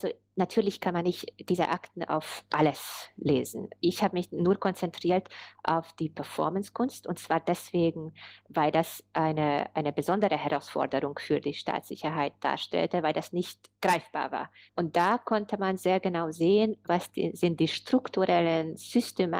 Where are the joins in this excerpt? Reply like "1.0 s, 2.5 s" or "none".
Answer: 14.7 s, 16.9 s